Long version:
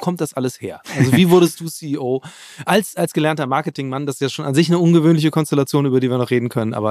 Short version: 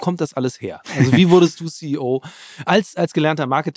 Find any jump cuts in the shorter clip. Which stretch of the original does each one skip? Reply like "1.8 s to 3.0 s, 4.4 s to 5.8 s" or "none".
none